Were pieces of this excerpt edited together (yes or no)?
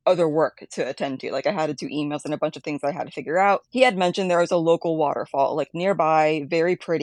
yes